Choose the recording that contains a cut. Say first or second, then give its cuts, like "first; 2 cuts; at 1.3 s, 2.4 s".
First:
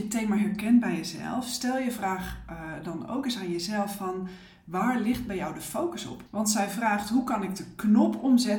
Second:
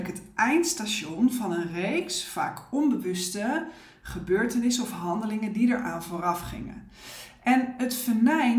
first; 1 cut; at 6.3 s